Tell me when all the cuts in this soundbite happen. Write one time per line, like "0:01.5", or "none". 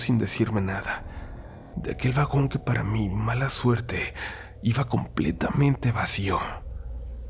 0:01.7